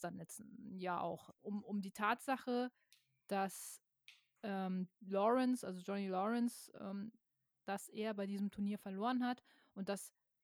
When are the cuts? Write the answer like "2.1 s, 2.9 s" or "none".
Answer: 1.3 s, 4.9 s, 7.5 s